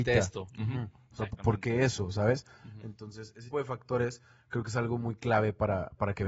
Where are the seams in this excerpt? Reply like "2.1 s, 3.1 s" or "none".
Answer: 3.5 s